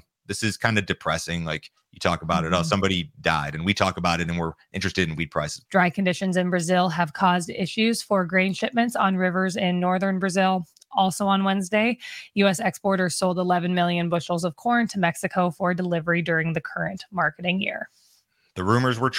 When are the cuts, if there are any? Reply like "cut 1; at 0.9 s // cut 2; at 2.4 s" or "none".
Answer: cut 1; at 5.7 s